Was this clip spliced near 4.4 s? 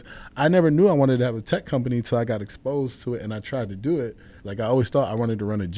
yes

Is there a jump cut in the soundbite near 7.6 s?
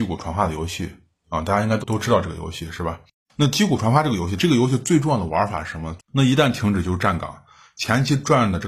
no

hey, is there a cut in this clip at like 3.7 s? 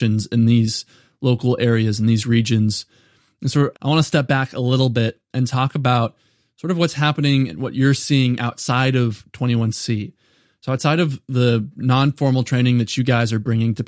yes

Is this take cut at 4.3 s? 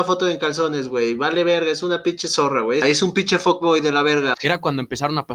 yes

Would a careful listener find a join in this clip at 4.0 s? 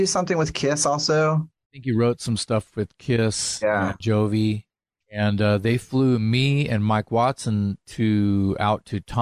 yes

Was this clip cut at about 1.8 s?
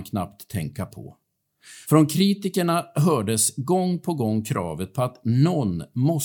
yes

